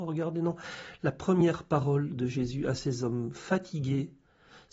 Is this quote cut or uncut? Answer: cut